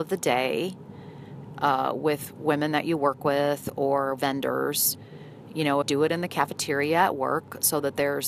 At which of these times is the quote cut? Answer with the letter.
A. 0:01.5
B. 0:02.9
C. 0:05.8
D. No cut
C